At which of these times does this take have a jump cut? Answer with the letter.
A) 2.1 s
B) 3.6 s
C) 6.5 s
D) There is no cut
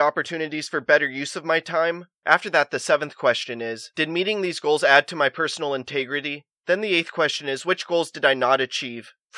D